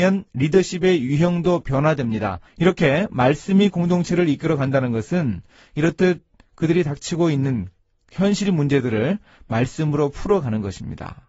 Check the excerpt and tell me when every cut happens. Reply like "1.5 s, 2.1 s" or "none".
2.5 s

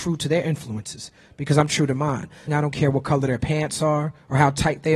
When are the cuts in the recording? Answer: 2.5 s

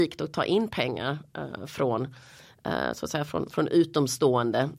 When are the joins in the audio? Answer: none

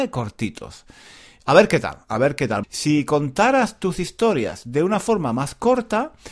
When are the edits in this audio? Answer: 2.6 s

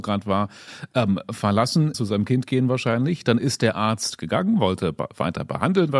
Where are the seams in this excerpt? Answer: 1.9 s

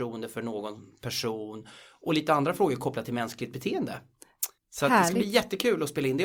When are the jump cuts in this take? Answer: 4.6 s

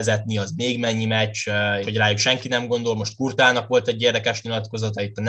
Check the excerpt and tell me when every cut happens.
1.8 s

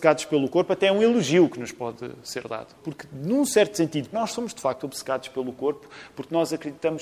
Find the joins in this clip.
2.8 s, 4.1 s

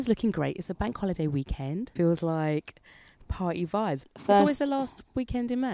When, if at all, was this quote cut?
2.0 s, 4.0 s

